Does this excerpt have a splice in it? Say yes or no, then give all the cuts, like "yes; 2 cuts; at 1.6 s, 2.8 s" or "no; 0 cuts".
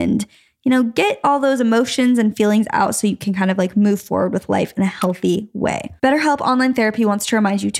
yes; 1 cut; at 6.0 s